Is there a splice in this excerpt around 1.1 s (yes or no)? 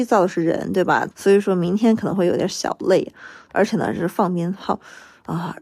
yes